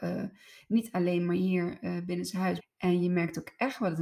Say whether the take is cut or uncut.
cut